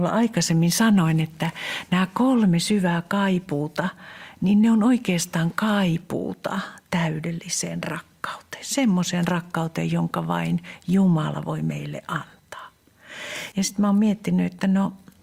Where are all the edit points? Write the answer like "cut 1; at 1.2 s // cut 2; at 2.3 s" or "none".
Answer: cut 1; at 13.5 s